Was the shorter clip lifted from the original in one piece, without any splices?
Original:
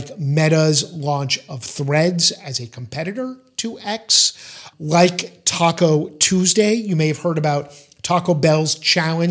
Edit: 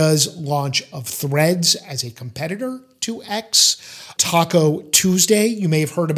no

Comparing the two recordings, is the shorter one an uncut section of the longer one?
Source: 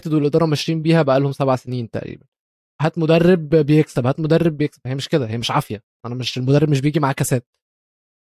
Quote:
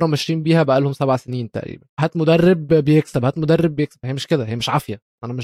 no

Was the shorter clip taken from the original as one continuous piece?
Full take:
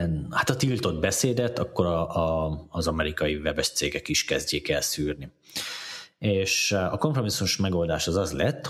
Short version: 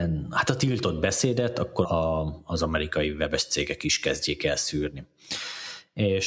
no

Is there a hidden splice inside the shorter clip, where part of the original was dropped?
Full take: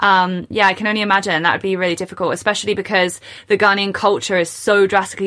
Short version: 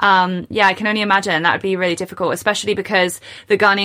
no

